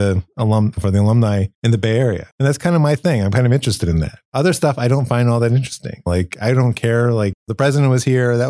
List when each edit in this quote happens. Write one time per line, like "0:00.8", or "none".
none